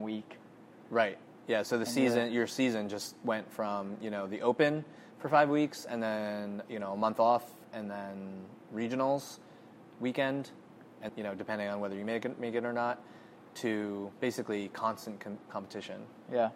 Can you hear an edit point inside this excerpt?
yes; 1 cut; at 11.1 s

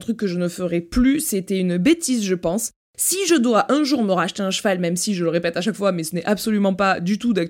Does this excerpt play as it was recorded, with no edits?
yes; 0 cuts

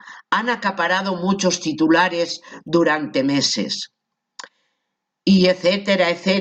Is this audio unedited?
yes; 0 cuts

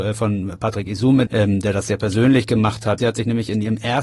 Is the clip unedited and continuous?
no; 2 cuts; at 1.3 s, 3.0 s

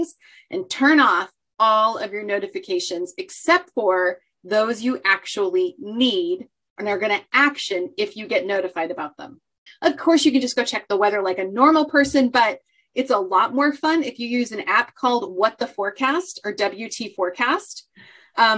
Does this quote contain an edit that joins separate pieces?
yes; 1 cut; at 9.7 s

